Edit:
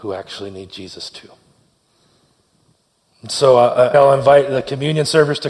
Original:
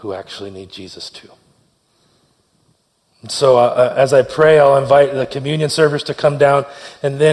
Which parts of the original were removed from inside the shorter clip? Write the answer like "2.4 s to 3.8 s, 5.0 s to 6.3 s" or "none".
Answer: 3.9 s to 4.6 s